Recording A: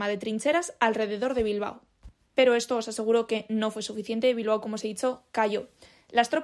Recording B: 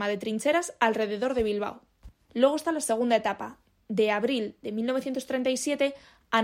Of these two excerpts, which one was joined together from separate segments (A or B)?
B